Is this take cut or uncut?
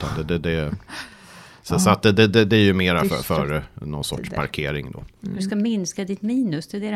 uncut